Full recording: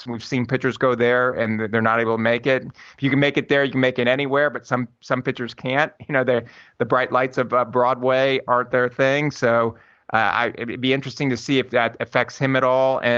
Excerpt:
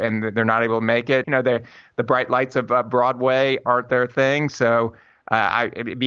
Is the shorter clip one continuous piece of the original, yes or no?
no